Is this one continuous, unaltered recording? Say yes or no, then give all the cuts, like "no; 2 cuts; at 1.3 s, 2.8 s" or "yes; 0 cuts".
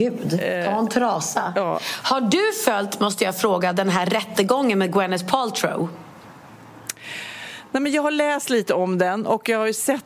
yes; 0 cuts